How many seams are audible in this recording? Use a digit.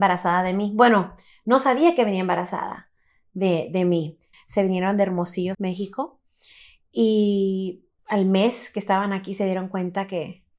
3